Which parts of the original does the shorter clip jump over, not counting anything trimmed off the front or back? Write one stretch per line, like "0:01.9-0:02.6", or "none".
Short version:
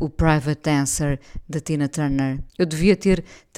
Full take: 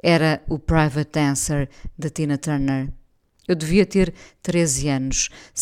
0:03.0-0:03.4